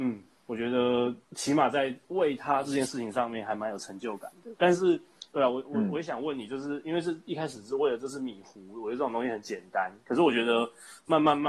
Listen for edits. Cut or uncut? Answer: cut